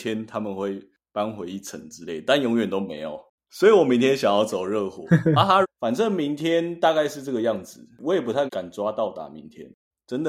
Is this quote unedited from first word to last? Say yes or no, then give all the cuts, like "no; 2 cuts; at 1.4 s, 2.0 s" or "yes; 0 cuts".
no; 2 cuts; at 5.6 s, 8.5 s